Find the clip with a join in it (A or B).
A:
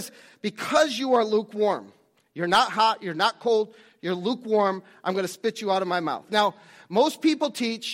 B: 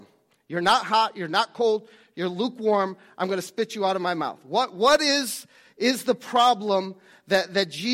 A